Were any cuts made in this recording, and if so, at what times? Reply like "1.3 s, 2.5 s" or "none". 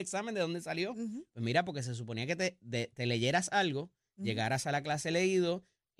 none